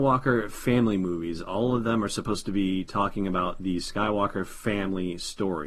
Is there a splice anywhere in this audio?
no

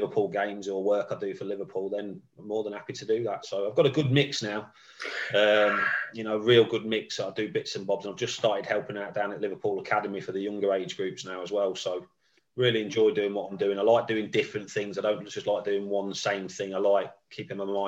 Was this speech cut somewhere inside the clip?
no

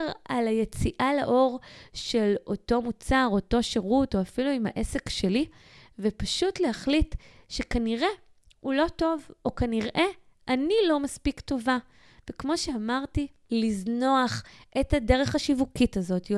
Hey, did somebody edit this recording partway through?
no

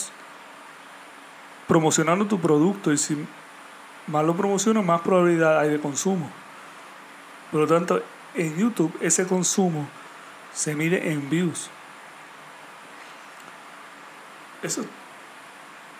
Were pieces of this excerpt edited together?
no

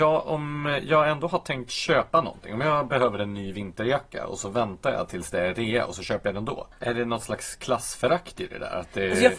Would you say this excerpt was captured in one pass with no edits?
no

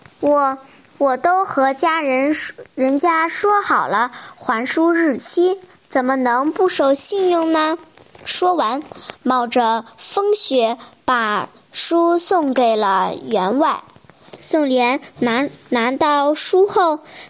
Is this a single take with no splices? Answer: no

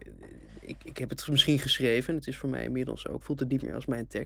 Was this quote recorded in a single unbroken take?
no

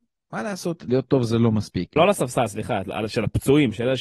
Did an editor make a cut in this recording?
yes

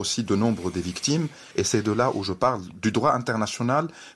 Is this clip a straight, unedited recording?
no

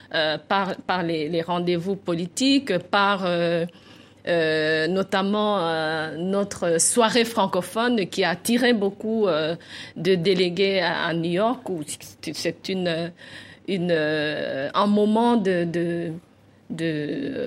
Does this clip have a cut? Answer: no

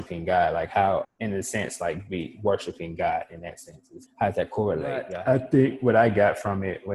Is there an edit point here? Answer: yes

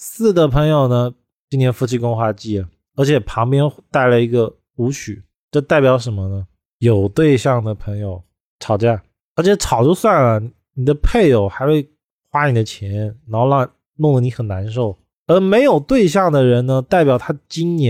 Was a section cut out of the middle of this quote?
yes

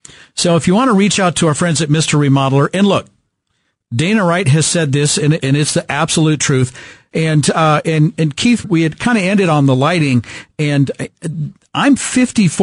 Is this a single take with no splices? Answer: no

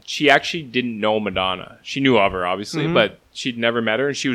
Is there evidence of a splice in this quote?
no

